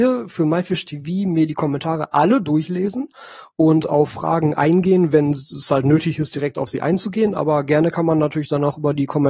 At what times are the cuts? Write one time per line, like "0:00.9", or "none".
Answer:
none